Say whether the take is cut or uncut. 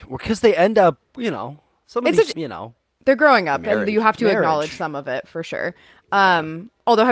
cut